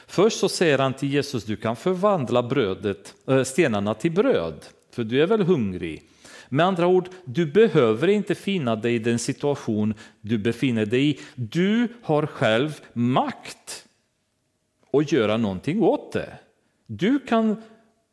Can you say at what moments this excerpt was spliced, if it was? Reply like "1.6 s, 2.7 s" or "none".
none